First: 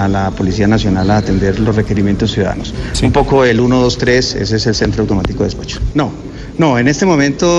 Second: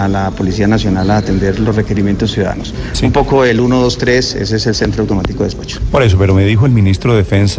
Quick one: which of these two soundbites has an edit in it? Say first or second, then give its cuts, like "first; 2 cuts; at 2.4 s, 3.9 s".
first; 1 cut; at 5.9 s